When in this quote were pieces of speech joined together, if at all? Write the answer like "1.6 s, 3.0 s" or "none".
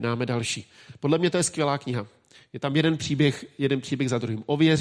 none